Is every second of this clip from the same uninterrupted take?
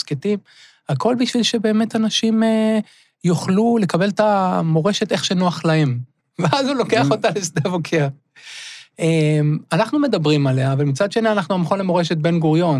no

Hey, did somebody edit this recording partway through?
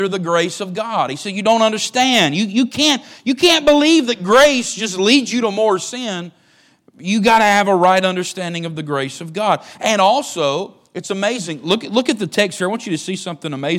no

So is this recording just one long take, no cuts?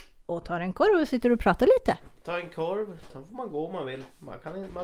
no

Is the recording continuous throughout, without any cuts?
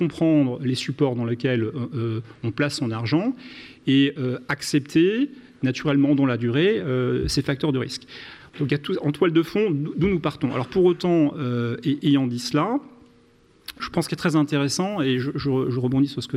no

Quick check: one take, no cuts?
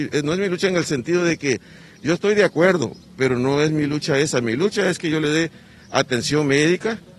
yes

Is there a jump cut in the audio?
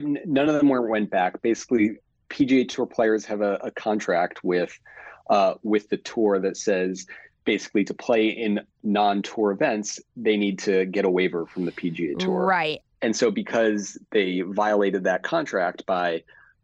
no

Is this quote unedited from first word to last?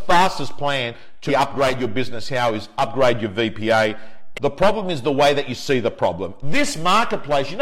no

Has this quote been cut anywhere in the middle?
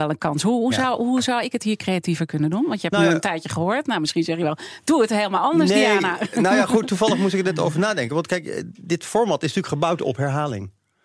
no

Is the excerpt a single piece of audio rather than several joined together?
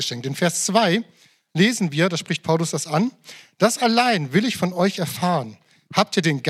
yes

